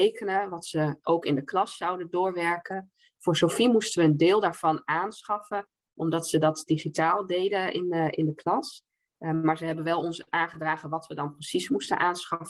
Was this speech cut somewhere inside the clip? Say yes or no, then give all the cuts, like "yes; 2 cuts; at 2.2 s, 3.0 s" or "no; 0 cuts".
no; 0 cuts